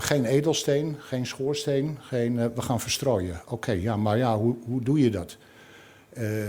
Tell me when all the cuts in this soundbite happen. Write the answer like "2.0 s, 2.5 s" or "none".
none